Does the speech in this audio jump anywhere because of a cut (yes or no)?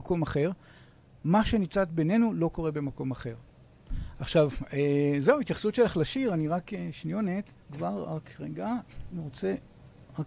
yes